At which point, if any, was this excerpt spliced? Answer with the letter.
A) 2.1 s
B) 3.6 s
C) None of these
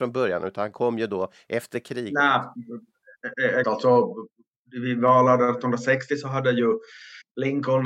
B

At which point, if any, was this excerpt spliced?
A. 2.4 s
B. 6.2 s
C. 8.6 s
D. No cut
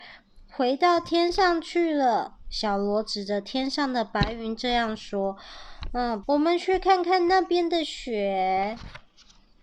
B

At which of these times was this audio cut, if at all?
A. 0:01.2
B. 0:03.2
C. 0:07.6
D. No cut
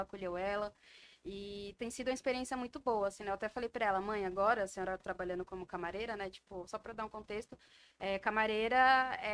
D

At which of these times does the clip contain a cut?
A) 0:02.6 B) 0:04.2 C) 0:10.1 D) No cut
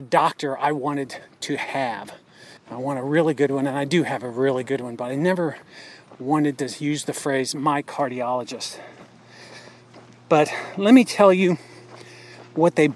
A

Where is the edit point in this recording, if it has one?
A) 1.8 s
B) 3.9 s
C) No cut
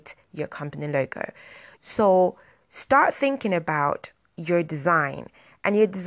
A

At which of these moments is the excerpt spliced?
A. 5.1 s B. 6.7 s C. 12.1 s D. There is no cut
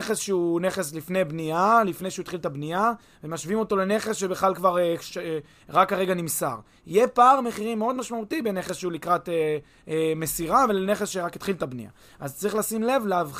A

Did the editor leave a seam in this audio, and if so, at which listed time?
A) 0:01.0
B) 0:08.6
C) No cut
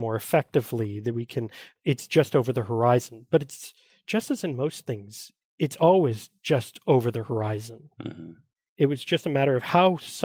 B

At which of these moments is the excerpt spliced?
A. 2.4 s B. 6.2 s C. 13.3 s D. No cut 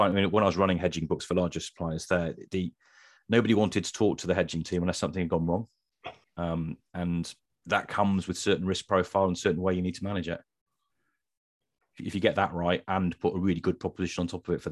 B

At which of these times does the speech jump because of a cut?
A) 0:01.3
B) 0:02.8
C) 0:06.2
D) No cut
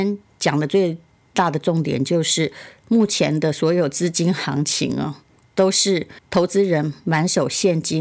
C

